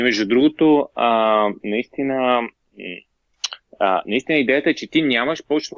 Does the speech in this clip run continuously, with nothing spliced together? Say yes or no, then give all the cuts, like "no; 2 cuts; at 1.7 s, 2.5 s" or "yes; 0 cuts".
no; 1 cut; at 1.6 s